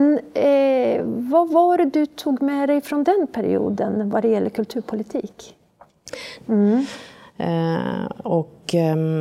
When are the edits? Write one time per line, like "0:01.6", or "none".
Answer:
0:06.4